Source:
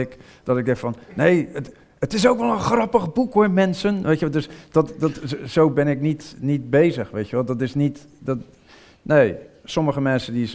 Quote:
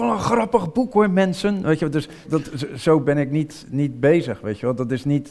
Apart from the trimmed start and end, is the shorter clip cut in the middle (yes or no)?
yes